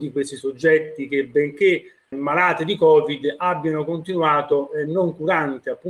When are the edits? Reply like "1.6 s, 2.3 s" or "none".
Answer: 2.1 s